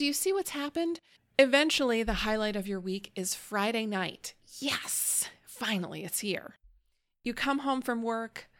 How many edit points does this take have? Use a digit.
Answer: 1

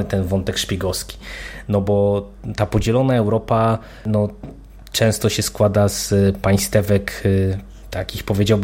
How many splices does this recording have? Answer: 0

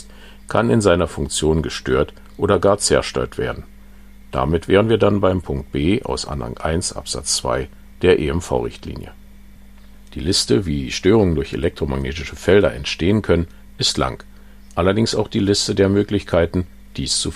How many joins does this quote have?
0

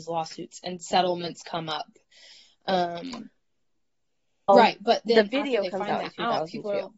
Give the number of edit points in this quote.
1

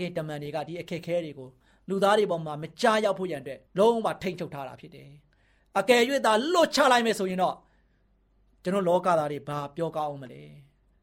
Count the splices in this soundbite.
1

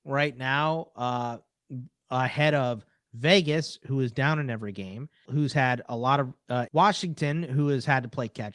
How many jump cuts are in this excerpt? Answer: 2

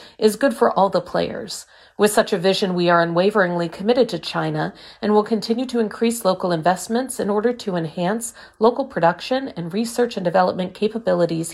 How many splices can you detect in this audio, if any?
0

